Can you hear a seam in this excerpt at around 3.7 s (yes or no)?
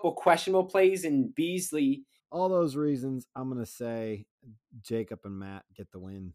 no